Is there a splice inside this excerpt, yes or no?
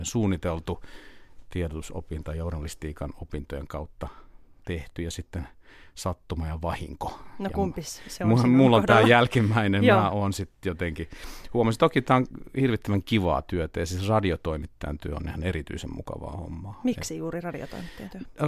no